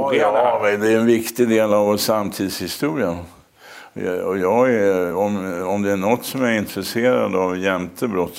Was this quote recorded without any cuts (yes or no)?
yes